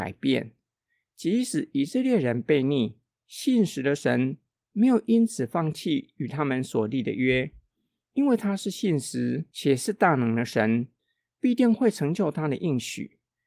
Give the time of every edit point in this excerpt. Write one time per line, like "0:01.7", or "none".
none